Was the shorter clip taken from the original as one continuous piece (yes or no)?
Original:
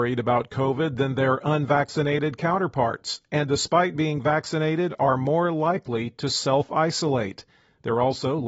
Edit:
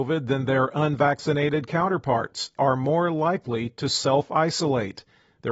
no